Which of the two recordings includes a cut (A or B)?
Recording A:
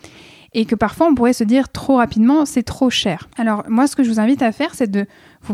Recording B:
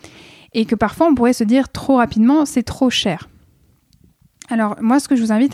A